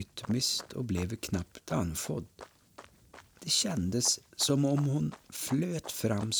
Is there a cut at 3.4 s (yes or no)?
yes